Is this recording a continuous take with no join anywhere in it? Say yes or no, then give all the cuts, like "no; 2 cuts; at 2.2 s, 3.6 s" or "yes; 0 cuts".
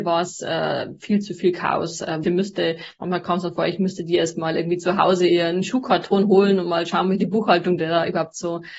no; 1 cut; at 2.2 s